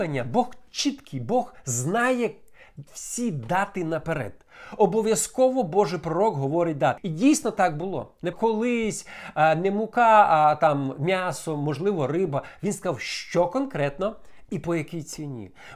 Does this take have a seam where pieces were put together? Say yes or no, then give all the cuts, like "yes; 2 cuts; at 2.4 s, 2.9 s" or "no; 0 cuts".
yes; 2 cuts; at 7.0 s, 8.3 s